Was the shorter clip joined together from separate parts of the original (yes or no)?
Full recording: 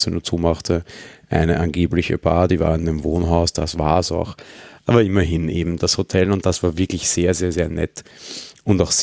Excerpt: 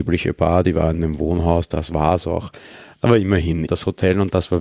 yes